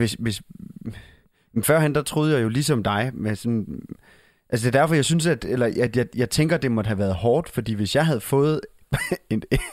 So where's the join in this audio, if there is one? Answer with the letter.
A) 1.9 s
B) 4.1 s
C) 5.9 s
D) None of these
D